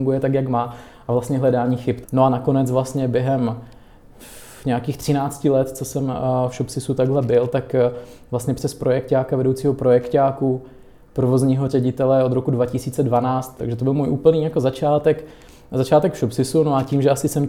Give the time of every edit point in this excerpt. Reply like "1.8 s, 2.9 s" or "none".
2.0 s, 13.6 s